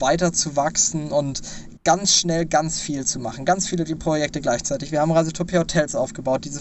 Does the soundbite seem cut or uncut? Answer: uncut